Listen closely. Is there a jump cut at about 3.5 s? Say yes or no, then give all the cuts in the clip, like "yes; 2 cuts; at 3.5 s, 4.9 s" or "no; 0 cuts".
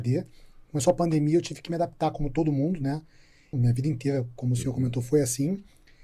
yes; 1 cut; at 3.5 s